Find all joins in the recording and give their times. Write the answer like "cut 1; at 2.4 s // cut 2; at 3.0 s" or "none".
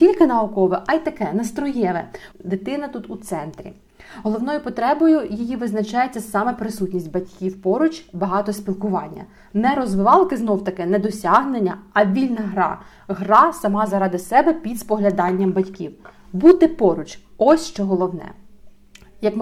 cut 1; at 2.3 s